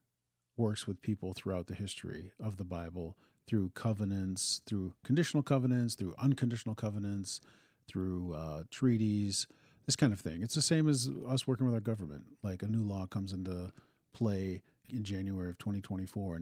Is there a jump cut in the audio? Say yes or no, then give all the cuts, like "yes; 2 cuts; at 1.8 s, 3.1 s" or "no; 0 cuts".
no; 0 cuts